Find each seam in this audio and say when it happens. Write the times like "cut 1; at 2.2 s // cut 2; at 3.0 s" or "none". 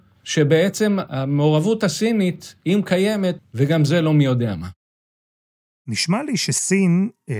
cut 1; at 3.4 s